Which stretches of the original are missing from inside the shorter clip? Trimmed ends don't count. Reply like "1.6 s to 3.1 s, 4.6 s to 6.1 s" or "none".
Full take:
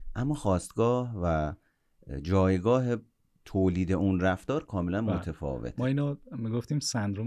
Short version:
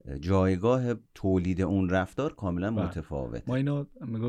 3.1 s to 3.4 s